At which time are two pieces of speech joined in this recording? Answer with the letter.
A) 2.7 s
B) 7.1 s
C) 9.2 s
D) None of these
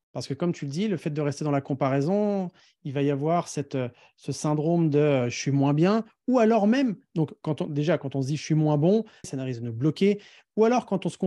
C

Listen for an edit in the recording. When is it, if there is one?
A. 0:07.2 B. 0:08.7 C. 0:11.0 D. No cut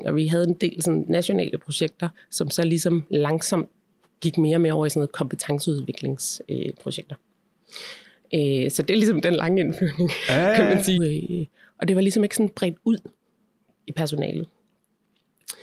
C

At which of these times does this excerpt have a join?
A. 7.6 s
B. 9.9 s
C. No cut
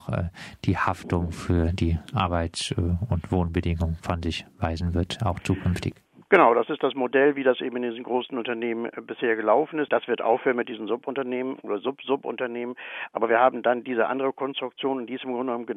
B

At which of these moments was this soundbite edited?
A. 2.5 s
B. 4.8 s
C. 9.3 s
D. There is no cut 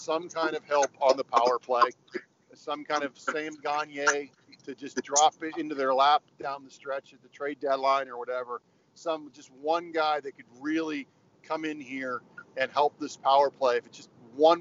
D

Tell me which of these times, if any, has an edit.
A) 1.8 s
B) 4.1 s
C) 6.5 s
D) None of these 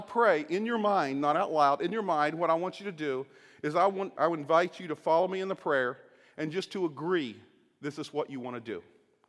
B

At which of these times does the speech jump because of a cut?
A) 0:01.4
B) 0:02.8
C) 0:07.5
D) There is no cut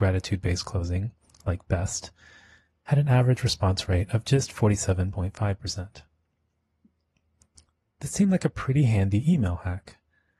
D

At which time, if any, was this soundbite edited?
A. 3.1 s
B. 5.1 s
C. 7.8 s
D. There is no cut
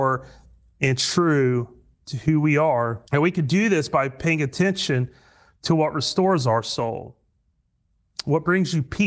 A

